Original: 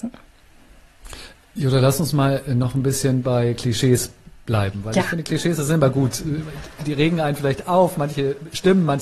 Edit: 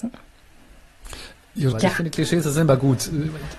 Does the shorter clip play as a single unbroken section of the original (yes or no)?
no